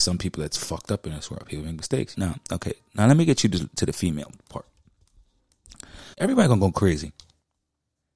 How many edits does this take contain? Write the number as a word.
two